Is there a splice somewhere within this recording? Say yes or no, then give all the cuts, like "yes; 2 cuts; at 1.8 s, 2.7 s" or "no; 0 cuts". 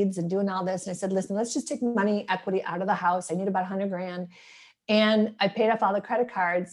no; 0 cuts